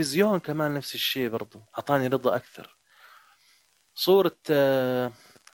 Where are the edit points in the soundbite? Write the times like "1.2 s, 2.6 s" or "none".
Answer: 1.7 s